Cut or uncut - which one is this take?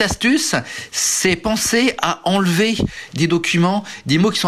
uncut